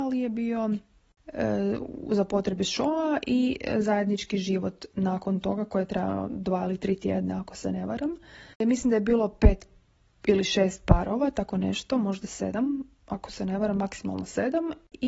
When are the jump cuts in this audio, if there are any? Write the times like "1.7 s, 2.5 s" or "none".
none